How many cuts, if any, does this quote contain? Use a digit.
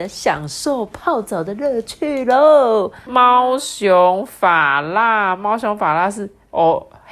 1